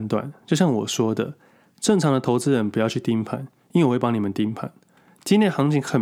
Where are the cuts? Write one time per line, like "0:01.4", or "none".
none